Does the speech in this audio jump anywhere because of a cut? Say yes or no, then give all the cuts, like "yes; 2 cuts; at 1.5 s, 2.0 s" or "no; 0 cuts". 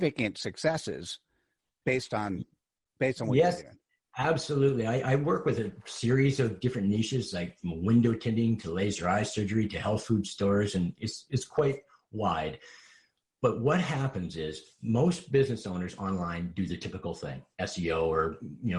no; 0 cuts